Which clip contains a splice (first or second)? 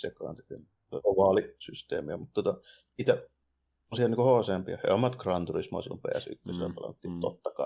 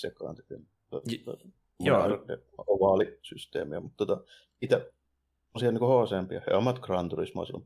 first